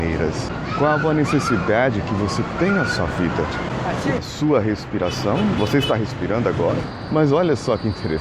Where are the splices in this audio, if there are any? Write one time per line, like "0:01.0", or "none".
0:04.2